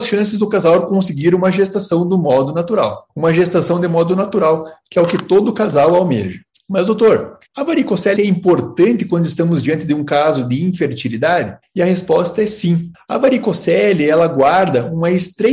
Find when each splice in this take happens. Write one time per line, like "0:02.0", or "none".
0:08.2